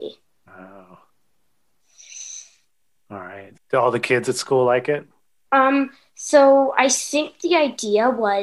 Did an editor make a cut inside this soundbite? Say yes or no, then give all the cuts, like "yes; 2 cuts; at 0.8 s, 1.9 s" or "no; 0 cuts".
yes; 2 cuts; at 3.5 s, 5.4 s